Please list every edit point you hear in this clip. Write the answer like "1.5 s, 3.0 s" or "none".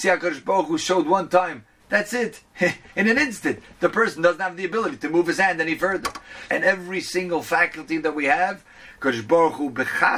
1.8 s, 6.5 s